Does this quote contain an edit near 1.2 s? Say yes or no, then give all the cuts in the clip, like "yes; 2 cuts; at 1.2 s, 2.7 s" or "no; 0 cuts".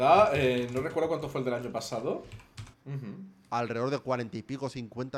no; 1 cut; at 2.7 s